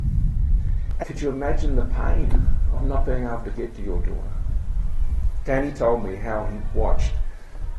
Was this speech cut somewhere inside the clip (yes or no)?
yes